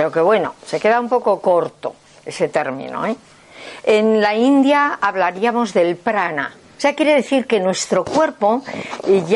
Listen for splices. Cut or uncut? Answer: cut